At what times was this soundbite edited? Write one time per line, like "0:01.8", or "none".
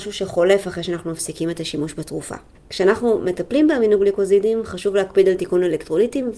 0:02.6